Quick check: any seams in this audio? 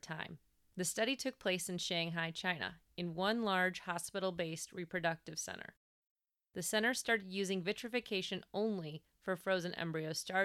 no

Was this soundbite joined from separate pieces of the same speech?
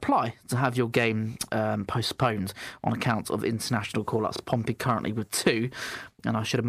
no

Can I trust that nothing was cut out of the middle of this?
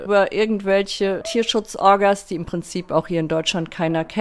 yes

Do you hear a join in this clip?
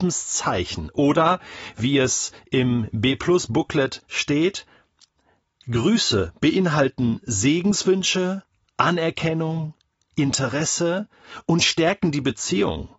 no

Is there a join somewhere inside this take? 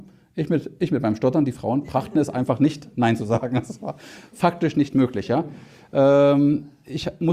no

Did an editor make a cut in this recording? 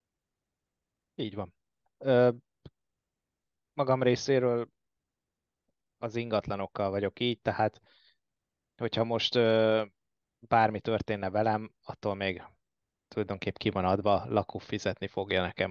yes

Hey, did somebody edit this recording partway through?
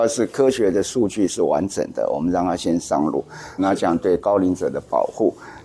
yes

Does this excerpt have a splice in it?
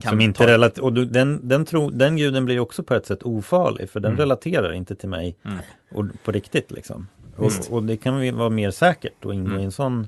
no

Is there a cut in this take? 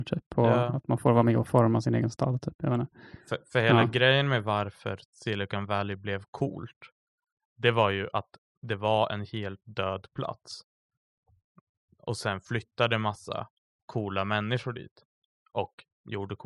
no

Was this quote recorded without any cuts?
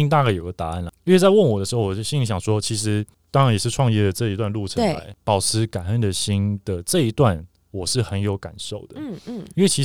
yes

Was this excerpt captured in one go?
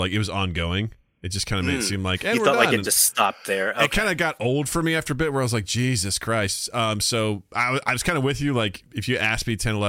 yes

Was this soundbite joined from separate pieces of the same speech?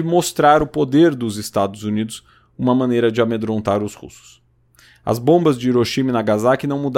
no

